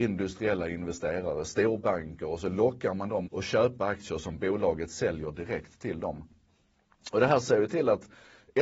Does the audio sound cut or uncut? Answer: cut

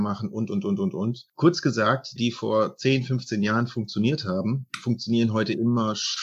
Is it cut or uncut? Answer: cut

